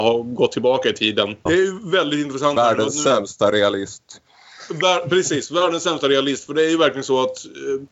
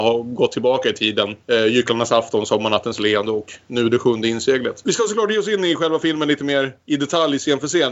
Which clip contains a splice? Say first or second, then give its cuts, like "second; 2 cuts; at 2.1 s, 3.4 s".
first; 1 cut; at 1.5 s